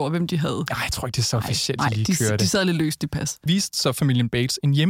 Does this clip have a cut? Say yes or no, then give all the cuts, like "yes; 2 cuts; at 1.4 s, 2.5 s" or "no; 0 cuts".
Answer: yes; 1 cut; at 3.5 s